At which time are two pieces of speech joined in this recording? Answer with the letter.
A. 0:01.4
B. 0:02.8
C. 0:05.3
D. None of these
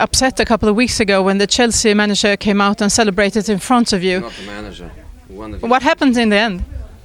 C